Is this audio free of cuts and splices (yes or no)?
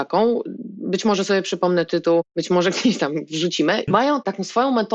no